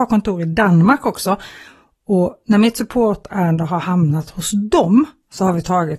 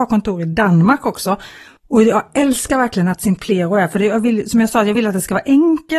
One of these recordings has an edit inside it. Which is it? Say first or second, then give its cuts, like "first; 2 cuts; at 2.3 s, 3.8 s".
second; 1 cut; at 1.8 s